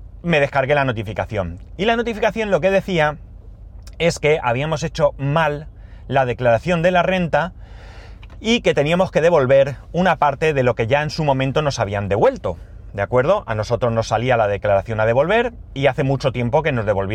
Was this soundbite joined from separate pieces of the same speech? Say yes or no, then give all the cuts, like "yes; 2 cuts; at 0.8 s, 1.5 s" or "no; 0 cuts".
no; 0 cuts